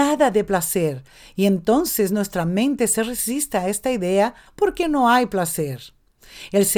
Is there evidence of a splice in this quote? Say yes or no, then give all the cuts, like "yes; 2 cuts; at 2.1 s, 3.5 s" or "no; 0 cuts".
yes; 1 cut; at 4.5 s